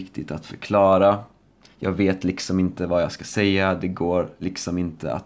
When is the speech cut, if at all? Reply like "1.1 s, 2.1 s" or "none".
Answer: none